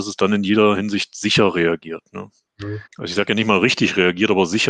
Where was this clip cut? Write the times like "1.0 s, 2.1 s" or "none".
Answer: 2.9 s